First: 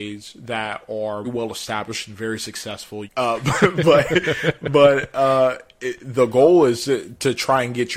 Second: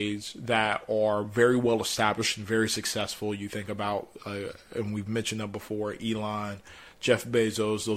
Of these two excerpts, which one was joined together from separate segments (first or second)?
first